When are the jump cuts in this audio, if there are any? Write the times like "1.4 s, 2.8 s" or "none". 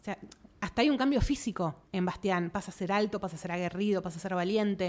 1.9 s